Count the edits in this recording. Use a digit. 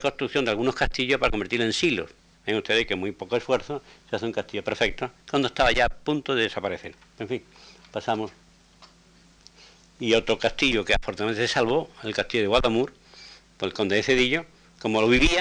1